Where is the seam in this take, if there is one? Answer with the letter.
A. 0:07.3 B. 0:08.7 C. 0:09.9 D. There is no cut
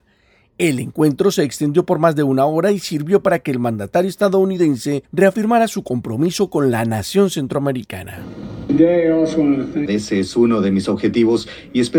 C